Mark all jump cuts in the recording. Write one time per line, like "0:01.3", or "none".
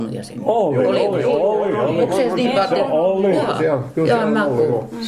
none